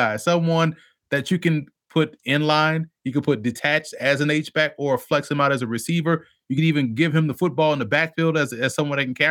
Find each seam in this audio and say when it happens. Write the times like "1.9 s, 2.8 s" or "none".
none